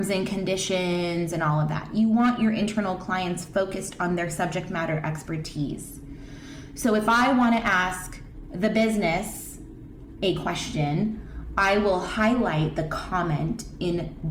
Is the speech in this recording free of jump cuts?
yes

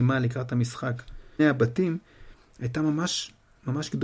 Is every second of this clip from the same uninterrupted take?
no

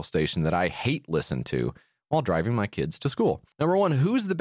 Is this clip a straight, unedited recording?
no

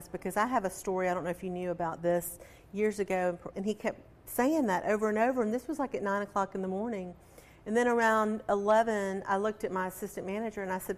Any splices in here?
yes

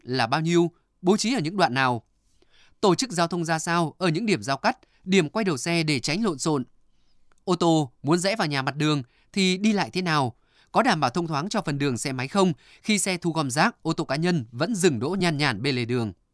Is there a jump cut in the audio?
no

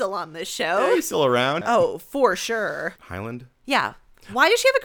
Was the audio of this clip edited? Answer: yes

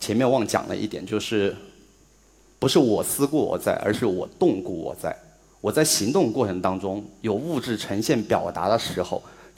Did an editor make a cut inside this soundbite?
no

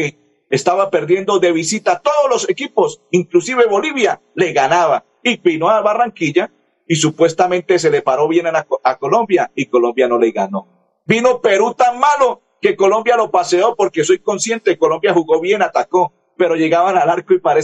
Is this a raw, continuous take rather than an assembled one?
yes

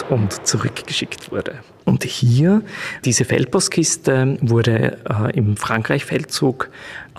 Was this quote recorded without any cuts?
no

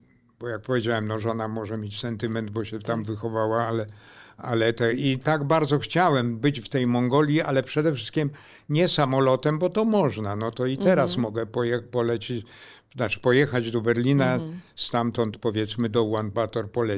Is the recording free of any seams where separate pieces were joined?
yes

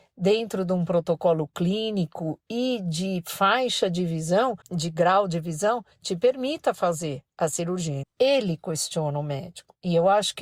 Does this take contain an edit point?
yes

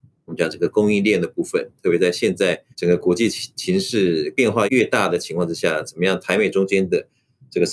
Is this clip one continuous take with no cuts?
no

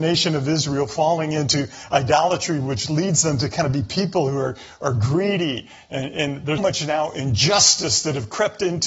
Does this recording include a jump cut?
yes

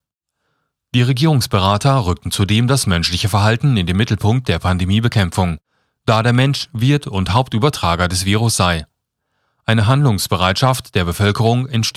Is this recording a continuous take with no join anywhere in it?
yes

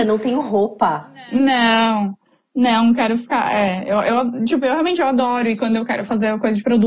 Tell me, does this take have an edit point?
no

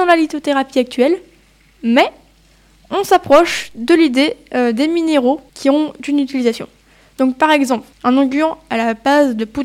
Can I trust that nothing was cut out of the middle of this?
no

